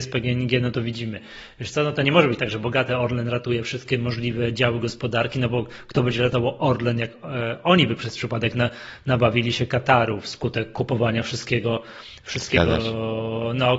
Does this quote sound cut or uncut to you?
uncut